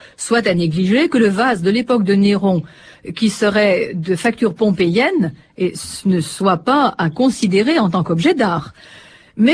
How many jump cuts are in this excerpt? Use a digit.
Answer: 0